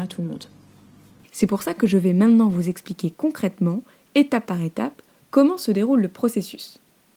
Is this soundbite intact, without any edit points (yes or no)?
no